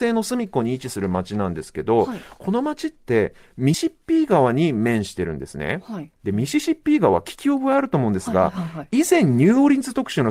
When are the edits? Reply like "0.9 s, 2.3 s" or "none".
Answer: 3.7 s